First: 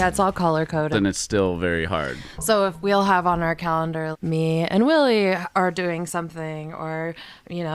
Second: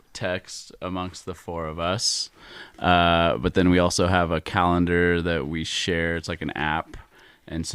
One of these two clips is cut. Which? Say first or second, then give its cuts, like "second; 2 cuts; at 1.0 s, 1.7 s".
first; 2 cuts; at 0.9 s, 4.1 s